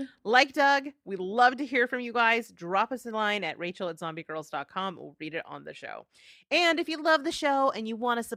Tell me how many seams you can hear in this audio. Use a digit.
0